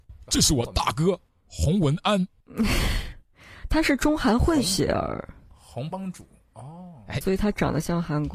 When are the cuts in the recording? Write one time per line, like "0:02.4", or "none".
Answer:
0:05.9
0:07.2